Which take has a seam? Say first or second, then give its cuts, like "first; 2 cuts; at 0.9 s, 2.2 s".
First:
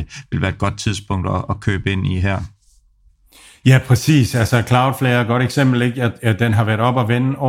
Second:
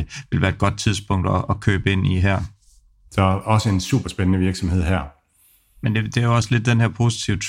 second; 1 cut; at 3.1 s